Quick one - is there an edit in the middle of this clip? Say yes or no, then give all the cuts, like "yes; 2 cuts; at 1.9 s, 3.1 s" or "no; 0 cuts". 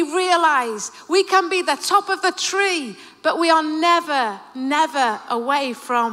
no; 0 cuts